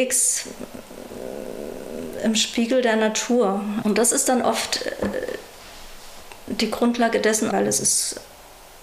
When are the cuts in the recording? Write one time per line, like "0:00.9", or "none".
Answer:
0:03.8
0:07.5